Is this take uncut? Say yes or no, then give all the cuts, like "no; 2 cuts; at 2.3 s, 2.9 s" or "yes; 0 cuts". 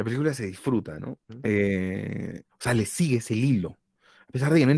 no; 2 cuts; at 1.2 s, 2.5 s